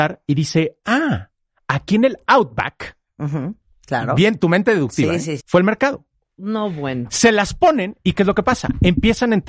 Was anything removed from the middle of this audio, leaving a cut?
yes; 1 cut; at 5.4 s

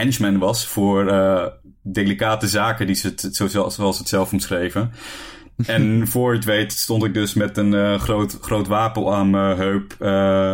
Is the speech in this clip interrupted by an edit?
no; 0 cuts

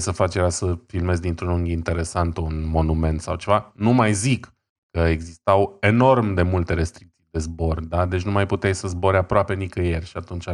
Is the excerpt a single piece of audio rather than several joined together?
yes; 0 cuts

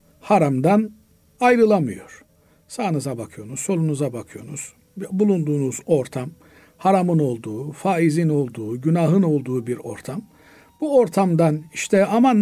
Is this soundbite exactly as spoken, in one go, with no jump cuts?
yes; 0 cuts

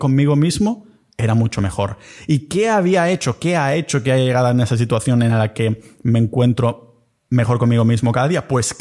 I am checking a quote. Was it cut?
no; 0 cuts

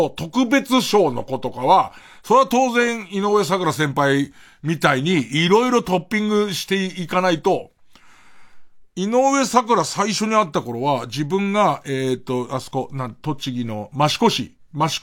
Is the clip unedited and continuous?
yes; 0 cuts

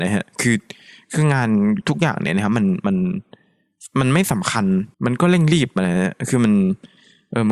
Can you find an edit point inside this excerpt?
yes; 1 cut; at 4.9 s

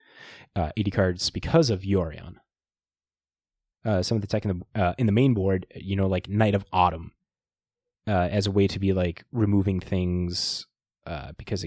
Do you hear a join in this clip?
no; 0 cuts

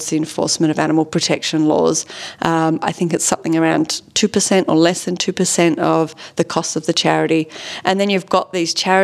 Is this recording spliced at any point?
no; 0 cuts

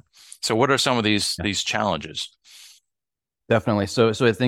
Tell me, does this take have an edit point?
no; 0 cuts

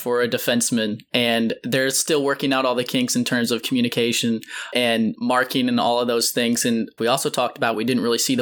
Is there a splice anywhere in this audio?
yes; 1 cut; at 7.0 s

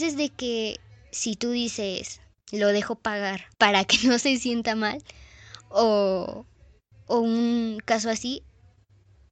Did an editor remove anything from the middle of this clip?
yes; 2 cuts; at 2.4 s, 3.5 s

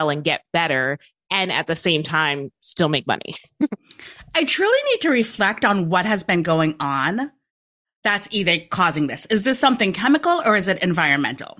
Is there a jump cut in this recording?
no; 0 cuts

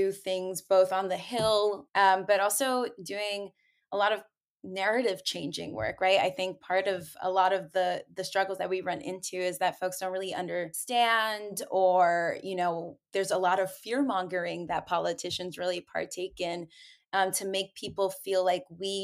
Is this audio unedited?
no; 1 cut; at 1.9 s

